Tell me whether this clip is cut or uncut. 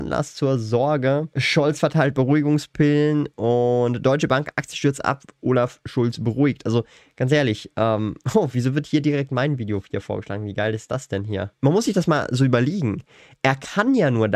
uncut